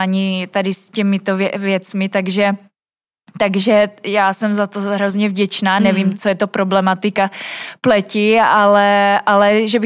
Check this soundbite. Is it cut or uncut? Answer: uncut